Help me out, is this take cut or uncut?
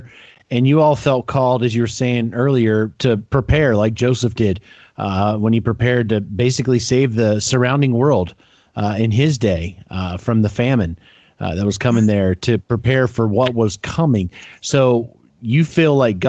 cut